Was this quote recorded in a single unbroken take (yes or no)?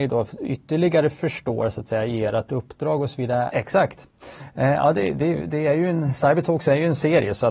no